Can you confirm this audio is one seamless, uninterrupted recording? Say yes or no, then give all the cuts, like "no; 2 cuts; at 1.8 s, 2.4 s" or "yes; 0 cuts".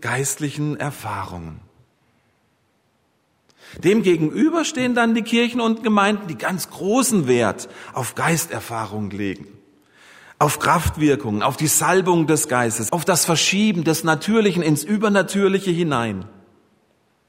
no; 1 cut; at 12.9 s